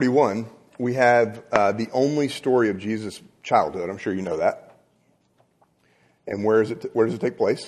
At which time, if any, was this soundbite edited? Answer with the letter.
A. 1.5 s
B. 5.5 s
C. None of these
C